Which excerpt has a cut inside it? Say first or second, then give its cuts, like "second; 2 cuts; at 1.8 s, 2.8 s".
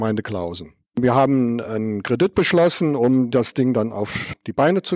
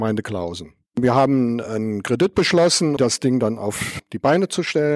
second; 1 cut; at 3.0 s